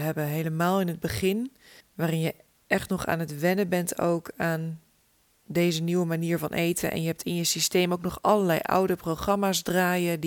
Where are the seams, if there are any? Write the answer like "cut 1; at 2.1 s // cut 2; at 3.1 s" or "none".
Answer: cut 1; at 1.8 s